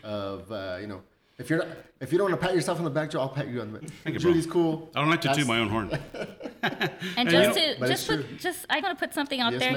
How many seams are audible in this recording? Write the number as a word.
two